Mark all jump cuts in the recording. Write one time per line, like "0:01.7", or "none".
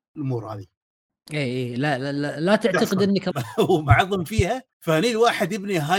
0:03.3
0:04.7

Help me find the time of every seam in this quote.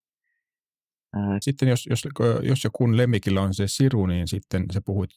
0:01.4

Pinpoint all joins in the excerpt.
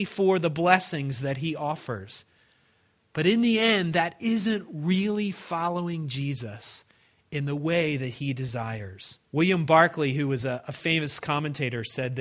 0:09.2

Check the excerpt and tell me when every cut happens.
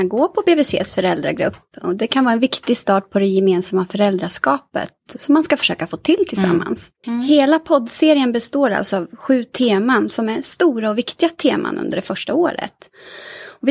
0:07.0

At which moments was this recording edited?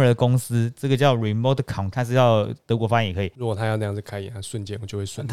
0:01.9
0:03.3

